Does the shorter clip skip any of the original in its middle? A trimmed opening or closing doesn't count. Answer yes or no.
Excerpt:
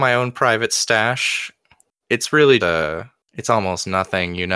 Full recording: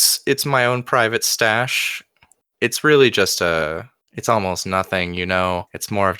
yes